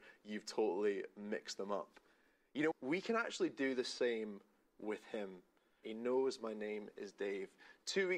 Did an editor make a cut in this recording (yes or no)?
yes